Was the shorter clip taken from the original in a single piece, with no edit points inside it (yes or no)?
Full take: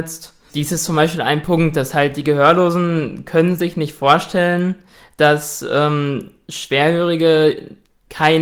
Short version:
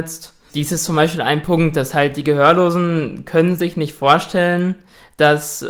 yes